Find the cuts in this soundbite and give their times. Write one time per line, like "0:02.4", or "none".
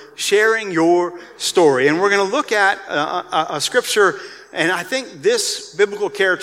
none